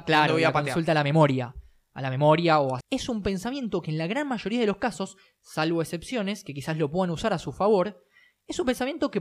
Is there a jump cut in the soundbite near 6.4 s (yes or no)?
no